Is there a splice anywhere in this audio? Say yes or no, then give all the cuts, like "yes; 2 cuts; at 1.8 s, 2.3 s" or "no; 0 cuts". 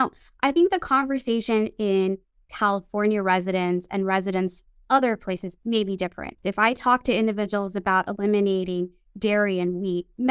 yes; 1 cut; at 6.4 s